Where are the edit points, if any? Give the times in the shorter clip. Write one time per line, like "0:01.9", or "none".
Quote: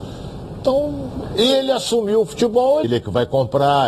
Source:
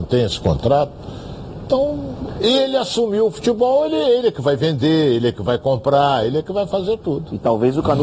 0:02.8